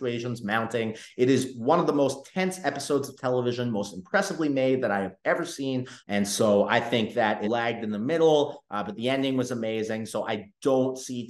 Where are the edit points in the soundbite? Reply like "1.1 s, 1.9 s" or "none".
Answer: 6.0 s, 7.4 s